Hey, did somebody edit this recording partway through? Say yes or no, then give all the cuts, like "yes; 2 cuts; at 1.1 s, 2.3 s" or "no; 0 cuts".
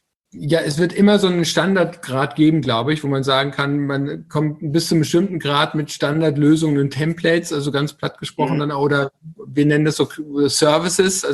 no; 0 cuts